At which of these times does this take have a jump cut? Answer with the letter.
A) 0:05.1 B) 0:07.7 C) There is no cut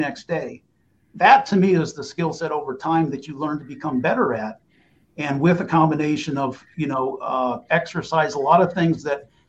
B